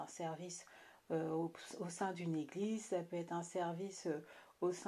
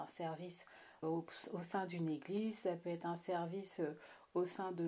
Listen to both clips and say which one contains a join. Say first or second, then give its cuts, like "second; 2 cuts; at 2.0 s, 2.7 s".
second; 1 cut; at 1.0 s